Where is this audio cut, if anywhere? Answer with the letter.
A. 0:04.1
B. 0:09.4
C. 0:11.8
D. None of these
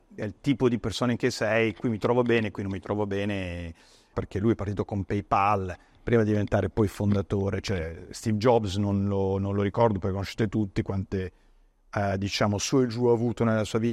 A